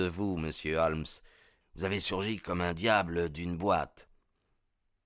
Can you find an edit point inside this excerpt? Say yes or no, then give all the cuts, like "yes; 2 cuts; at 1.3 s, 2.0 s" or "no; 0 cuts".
yes; 1 cut; at 1.6 s